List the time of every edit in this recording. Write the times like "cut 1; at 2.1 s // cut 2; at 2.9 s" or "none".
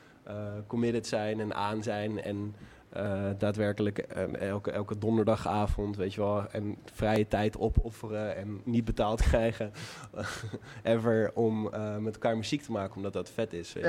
none